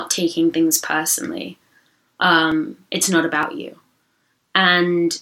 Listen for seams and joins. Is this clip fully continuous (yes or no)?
yes